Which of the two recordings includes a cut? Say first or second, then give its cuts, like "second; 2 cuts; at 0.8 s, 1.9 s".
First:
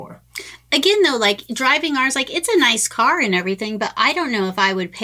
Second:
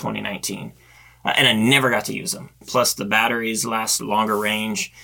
second; 2 cuts; at 2.6 s, 4.0 s